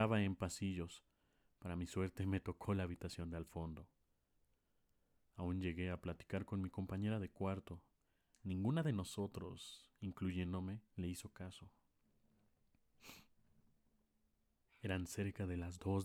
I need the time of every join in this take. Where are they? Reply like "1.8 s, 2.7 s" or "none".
8.3 s, 10.9 s